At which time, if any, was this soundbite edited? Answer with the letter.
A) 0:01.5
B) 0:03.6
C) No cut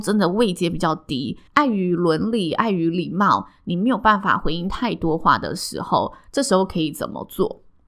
A